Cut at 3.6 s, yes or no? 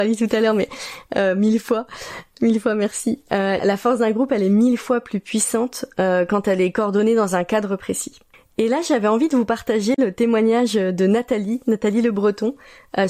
yes